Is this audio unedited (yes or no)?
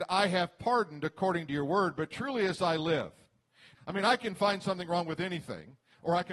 no